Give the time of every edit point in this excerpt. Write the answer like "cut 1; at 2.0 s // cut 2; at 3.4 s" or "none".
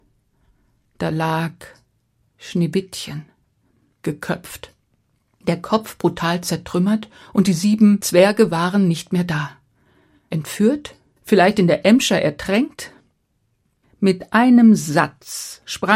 cut 1; at 11.2 s // cut 2; at 13.8 s